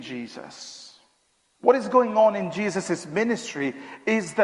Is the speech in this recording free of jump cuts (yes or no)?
no